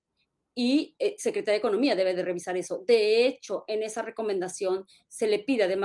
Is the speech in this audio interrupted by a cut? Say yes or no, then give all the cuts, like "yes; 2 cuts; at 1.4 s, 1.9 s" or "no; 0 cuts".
no; 0 cuts